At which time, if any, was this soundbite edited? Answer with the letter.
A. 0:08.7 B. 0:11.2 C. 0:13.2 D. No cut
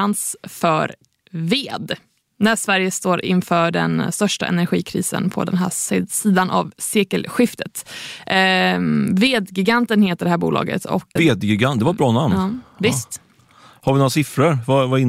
B